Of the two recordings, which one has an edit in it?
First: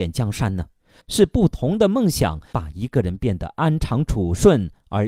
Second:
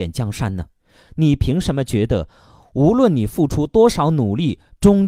first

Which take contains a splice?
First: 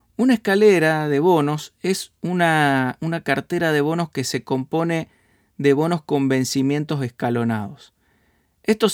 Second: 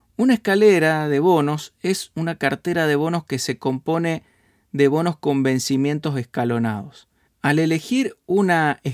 second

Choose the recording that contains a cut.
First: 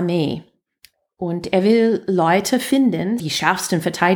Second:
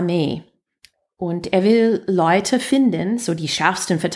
first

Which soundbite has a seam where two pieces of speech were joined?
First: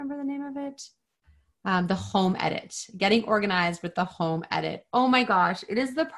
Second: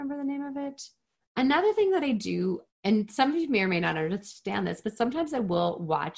second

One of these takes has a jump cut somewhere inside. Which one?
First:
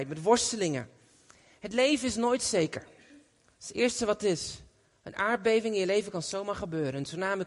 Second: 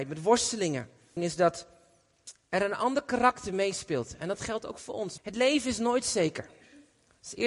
second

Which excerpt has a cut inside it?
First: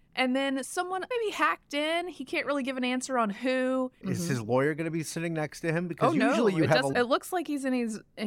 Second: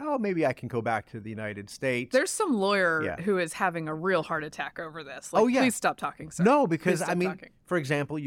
first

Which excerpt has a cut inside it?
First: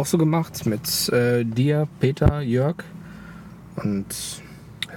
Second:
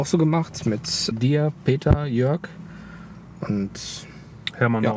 second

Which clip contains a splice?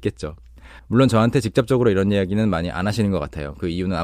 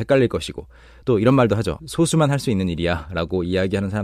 second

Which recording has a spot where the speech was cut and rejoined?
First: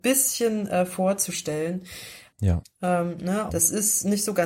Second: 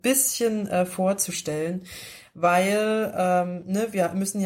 first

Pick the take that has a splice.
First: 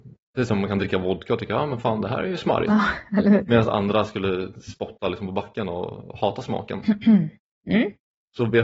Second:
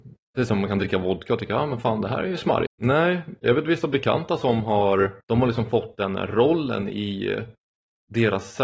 second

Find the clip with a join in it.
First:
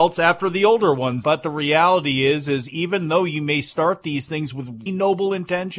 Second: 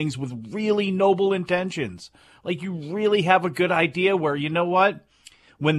first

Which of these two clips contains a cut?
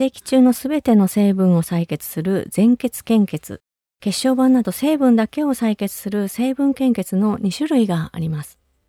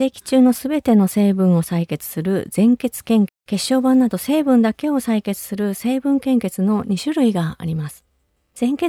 second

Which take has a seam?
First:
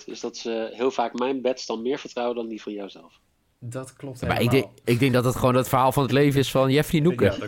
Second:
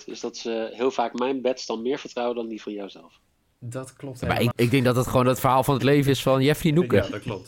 second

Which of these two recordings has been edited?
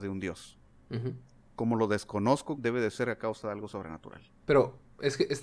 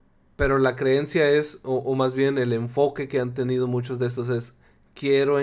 first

